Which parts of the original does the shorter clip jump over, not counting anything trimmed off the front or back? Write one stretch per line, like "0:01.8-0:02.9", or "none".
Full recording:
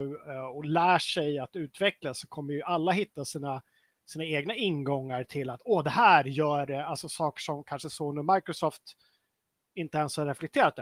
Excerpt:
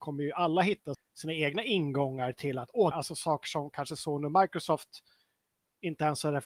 0:03.2-0:03.9
0:05.8-0:06.8